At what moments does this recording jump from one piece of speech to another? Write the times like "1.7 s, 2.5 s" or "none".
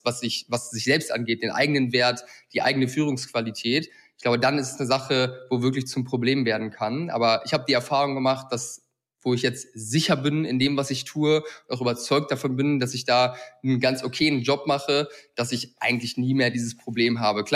none